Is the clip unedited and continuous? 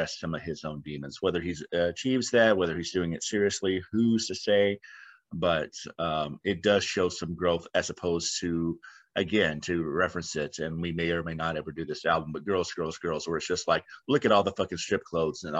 yes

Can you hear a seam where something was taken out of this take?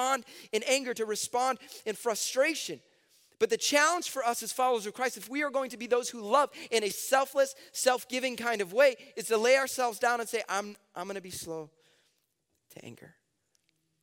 no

